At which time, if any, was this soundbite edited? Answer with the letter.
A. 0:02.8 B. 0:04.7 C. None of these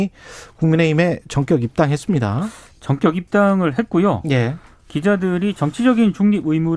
C